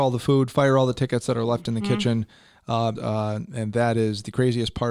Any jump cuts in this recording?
yes; 1 cut; at 3.0 s

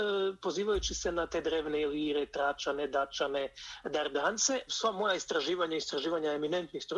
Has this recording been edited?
yes; 1 cut; at 4.7 s

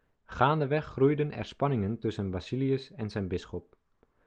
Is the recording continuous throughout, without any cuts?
yes; 0 cuts

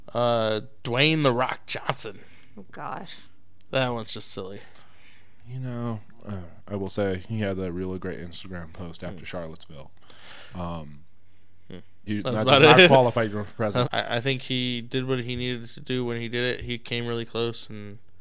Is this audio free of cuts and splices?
no; 2 cuts; at 12.1 s, 13.8 s

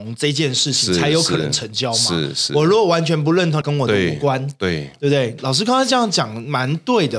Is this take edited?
yes; 1 cut; at 3.6 s

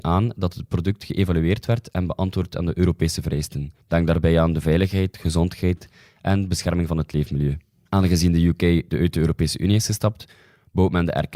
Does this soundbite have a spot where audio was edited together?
yes; 1 cut; at 3.8 s

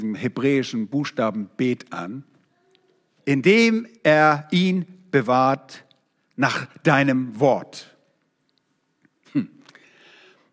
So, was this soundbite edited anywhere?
yes; 1 cut; at 3.2 s

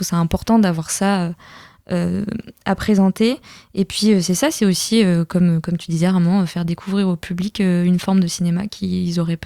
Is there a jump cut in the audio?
no; 0 cuts

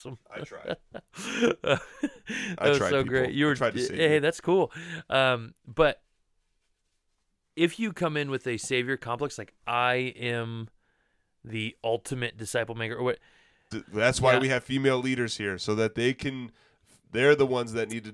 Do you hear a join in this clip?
yes; 1 cut; at 13.7 s

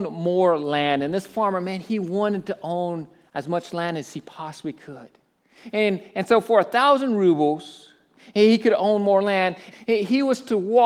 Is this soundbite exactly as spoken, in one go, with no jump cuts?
no; 1 cut; at 9.7 s

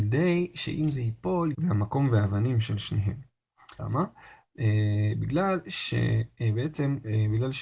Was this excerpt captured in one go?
no; 2 cuts; at 1.5 s, 3.8 s

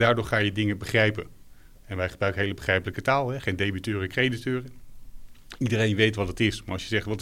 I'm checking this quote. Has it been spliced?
no; 0 cuts

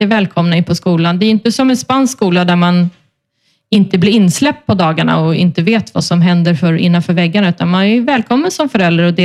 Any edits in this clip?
no; 0 cuts

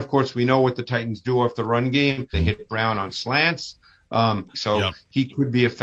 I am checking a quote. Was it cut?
yes; 2 cuts; at 2.3 s, 4.5 s

